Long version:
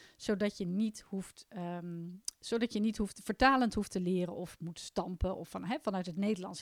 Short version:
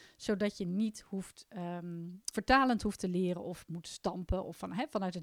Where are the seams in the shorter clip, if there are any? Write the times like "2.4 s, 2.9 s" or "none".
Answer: 2.3 s